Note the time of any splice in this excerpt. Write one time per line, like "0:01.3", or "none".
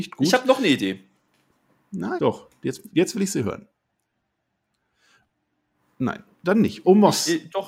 0:02.2